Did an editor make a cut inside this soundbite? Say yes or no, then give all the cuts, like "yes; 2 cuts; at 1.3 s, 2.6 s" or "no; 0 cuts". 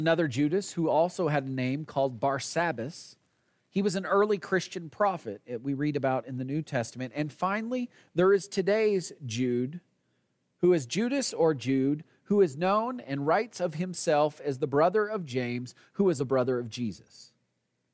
yes; 1 cut; at 16.2 s